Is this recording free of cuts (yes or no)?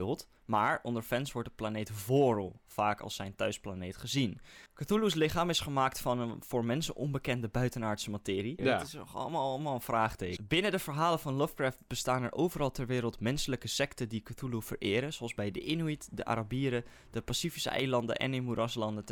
no